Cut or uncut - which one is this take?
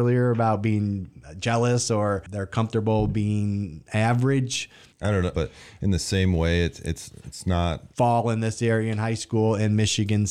cut